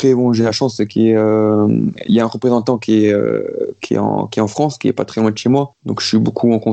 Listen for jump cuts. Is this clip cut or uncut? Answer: uncut